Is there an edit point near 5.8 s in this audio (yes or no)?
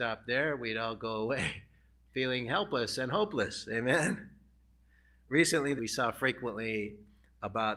yes